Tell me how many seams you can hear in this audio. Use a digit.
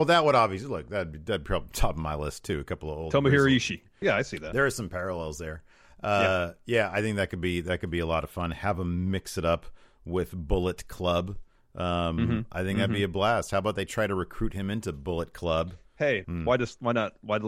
2